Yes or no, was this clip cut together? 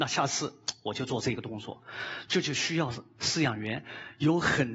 yes